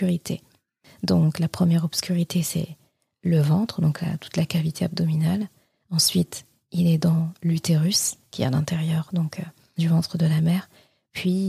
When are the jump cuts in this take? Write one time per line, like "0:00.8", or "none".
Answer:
none

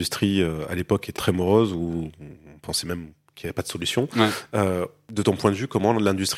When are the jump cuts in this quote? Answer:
0:01.2

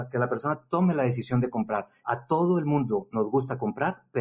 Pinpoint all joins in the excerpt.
0:02.0

